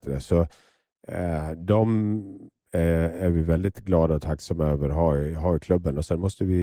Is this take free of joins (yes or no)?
yes